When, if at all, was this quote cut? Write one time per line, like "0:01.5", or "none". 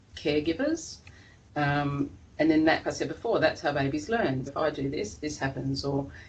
0:02.8
0:04.5

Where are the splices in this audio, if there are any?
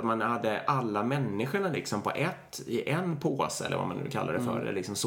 none

